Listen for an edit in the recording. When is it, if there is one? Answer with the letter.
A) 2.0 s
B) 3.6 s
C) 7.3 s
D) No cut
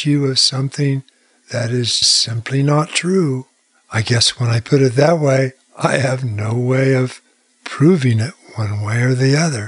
A